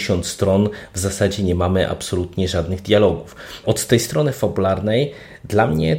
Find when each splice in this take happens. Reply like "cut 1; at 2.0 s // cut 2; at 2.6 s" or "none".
cut 1; at 3.6 s